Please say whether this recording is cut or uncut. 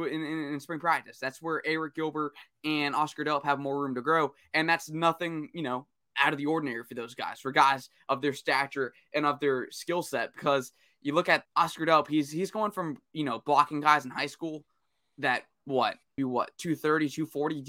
cut